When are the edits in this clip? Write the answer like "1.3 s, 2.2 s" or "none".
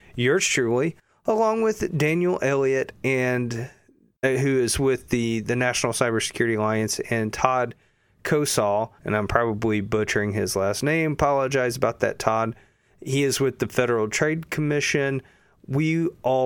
9.0 s